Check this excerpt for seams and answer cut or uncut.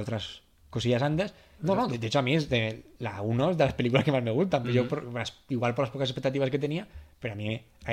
cut